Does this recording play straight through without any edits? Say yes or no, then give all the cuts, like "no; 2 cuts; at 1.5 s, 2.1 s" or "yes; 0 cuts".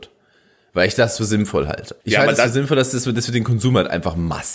no; 1 cut; at 2.0 s